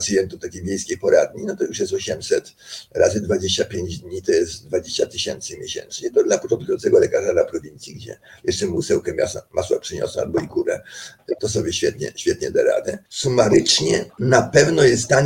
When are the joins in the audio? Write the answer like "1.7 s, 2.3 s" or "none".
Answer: 11.4 s, 13.1 s

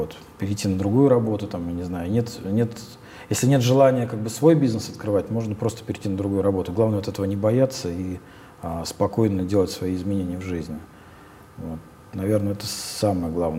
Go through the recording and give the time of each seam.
none

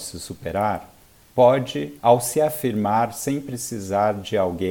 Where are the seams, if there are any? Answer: none

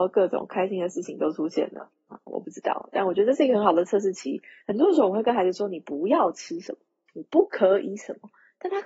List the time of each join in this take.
4.6 s

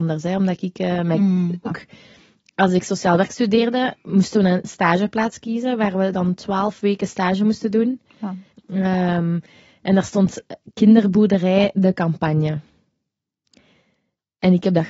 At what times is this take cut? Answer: 1.7 s, 8.5 s

